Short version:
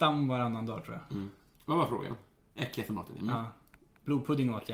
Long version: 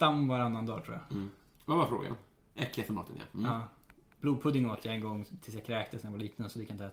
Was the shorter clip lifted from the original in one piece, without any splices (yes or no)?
no